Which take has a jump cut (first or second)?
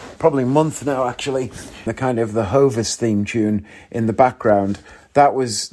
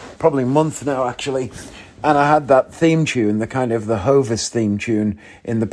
first